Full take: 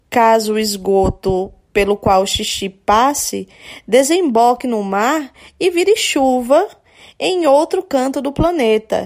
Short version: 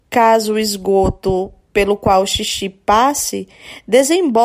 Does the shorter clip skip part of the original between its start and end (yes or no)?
no